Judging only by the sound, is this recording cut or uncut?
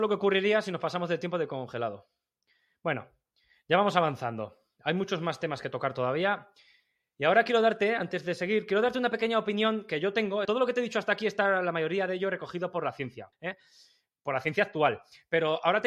cut